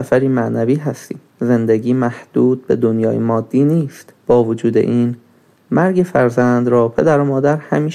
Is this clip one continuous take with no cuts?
no; 2 cuts; at 1.3 s, 4.2 s

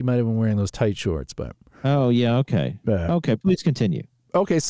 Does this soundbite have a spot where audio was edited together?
no; 0 cuts

